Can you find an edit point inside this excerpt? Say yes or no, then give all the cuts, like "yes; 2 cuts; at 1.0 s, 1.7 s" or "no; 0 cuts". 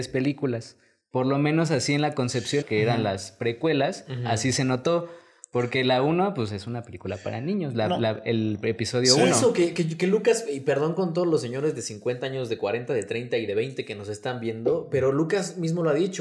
yes; 1 cut; at 2.6 s